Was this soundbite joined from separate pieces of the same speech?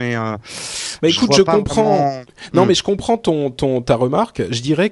no; 0 cuts

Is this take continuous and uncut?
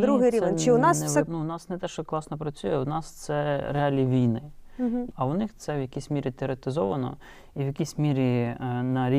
no; 2 cuts; at 1.3 s, 5.1 s

